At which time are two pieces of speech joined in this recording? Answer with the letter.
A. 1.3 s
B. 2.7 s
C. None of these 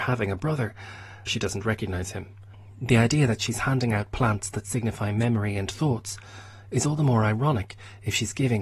A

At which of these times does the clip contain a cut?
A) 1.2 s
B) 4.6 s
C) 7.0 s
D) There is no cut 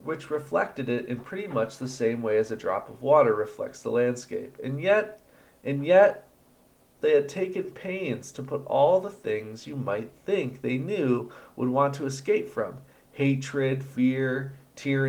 C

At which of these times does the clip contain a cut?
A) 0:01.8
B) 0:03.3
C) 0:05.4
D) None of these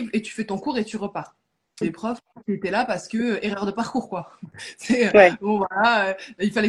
A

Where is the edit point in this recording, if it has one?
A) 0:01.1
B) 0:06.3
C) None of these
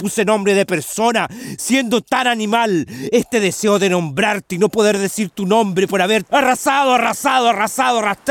B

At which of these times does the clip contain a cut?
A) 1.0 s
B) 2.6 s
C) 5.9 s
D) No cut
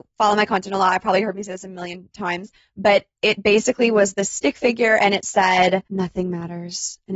C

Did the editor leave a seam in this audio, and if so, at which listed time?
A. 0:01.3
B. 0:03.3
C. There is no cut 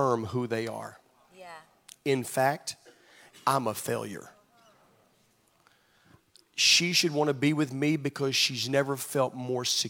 B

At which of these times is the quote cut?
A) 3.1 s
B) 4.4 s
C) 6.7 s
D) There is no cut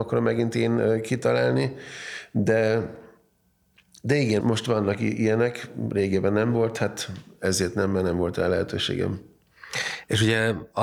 B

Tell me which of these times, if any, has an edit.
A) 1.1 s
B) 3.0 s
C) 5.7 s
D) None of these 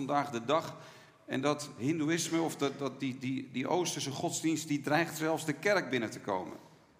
D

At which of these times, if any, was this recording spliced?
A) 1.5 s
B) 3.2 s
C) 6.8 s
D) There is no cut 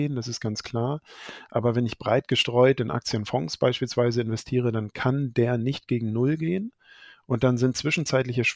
D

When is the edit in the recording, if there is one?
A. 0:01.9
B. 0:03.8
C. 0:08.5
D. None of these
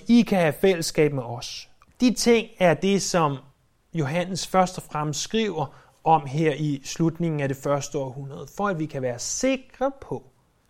A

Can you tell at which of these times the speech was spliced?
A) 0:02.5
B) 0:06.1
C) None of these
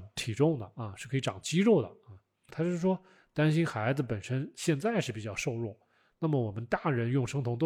A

